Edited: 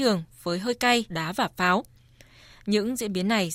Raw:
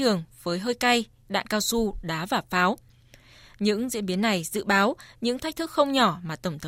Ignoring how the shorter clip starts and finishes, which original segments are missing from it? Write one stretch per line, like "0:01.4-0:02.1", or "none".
0:01.1-0:02.0